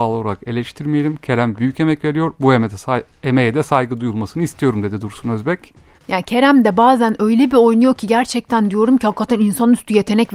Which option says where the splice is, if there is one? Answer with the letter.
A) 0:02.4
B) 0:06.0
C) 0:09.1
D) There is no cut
B